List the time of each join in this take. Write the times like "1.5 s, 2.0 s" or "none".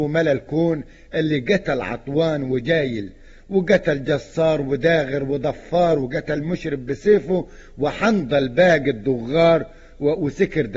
none